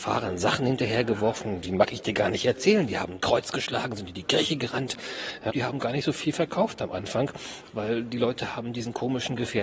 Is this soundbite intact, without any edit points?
no; 1 cut; at 5.5 s

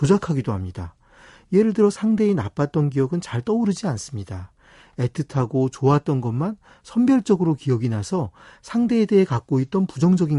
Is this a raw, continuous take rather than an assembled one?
yes; 0 cuts

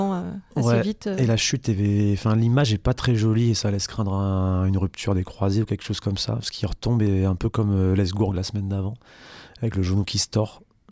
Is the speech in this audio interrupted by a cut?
no; 0 cuts

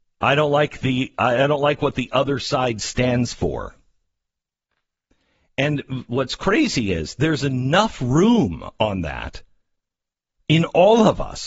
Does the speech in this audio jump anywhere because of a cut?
no; 0 cuts

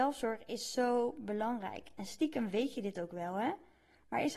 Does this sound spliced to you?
no; 0 cuts

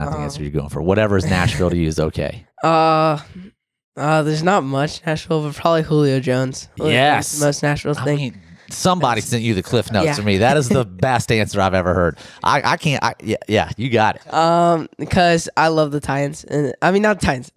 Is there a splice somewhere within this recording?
no; 0 cuts

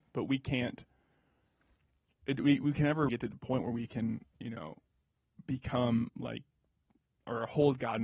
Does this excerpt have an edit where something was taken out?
yes; 1 cut; at 3.1 s

